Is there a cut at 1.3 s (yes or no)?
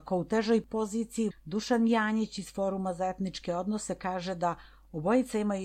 yes